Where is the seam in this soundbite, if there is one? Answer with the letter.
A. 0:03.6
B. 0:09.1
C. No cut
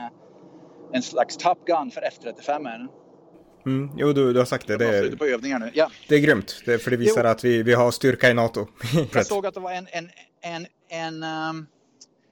B